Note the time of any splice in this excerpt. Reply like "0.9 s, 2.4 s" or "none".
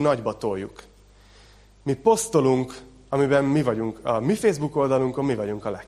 none